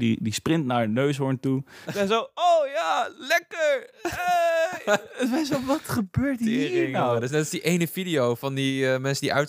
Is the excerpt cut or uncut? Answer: cut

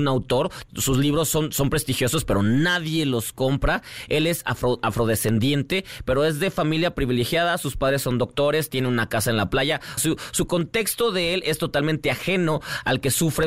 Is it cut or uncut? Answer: cut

